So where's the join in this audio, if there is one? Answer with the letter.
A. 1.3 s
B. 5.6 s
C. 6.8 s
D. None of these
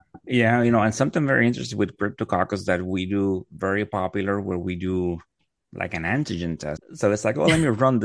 C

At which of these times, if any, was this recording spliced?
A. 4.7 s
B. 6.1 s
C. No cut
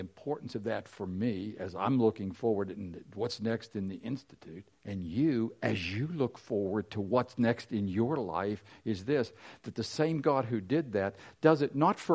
A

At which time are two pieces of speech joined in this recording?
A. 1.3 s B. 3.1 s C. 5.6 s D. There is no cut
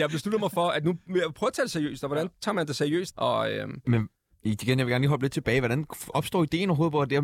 B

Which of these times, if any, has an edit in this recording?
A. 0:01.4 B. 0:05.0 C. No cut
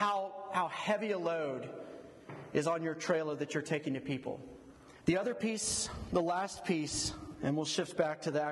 B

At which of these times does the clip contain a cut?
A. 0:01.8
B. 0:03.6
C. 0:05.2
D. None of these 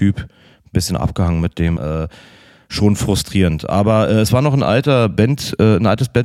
A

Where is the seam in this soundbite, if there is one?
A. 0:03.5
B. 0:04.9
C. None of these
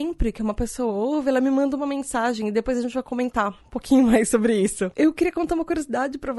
B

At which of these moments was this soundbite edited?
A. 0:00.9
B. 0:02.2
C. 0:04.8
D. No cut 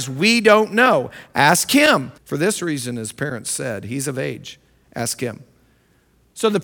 B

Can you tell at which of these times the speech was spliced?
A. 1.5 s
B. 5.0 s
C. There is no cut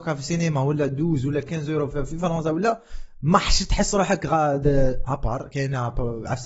B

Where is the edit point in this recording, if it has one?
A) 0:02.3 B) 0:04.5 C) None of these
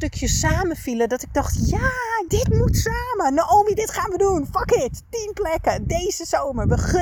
A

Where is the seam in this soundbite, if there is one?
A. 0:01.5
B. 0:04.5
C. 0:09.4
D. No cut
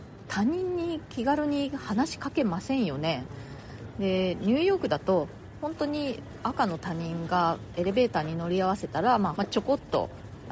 C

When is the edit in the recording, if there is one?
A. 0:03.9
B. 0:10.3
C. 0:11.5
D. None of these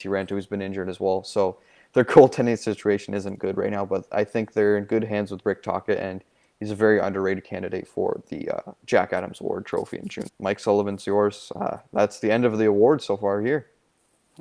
B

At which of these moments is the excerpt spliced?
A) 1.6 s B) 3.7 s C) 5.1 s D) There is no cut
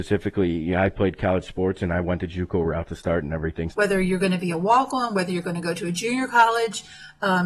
B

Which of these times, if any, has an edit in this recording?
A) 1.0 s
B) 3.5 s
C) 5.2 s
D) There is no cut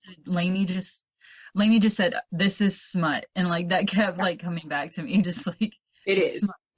D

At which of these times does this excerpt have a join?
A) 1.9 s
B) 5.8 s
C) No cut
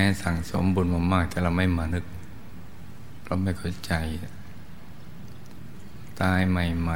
A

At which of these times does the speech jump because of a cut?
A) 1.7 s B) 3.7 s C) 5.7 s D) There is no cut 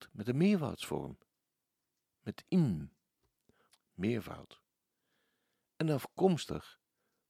B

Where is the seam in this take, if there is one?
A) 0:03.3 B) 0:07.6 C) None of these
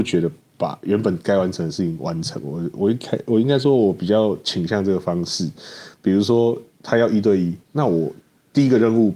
B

